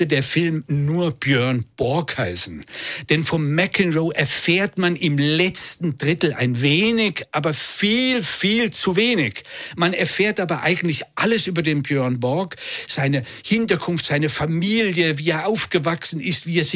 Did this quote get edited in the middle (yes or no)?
no